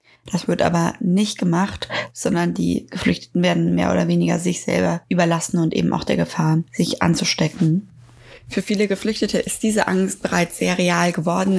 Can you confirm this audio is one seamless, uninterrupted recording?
yes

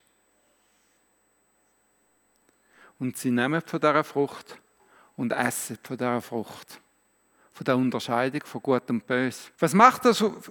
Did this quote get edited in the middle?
yes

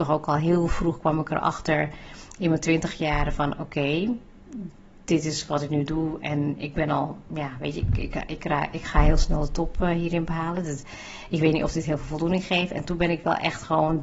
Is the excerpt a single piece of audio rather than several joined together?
yes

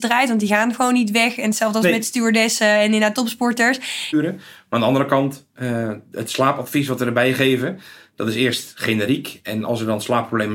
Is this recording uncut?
no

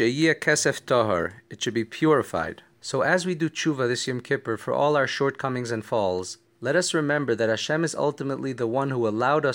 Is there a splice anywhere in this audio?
yes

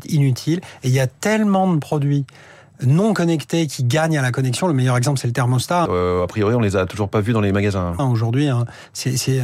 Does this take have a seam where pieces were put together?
yes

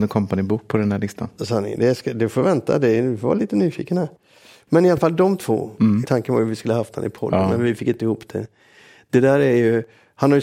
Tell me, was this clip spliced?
yes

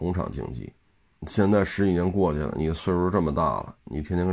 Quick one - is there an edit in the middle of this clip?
yes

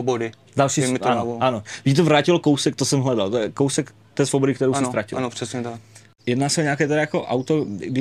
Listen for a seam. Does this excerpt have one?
no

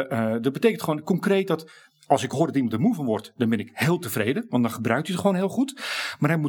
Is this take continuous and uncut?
yes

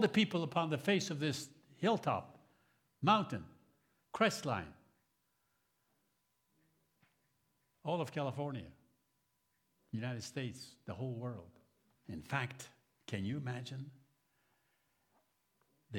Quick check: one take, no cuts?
no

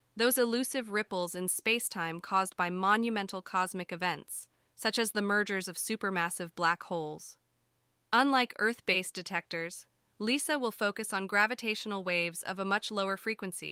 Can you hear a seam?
no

